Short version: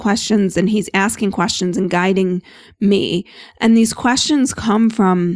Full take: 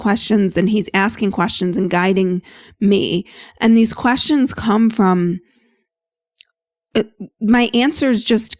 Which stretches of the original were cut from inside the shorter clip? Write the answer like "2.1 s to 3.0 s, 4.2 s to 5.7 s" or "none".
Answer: none